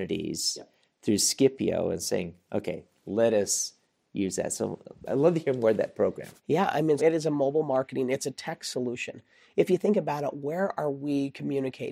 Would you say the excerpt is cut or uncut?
cut